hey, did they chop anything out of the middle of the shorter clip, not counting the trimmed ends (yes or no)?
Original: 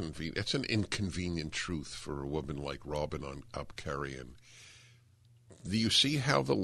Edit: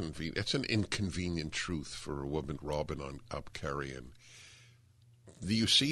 yes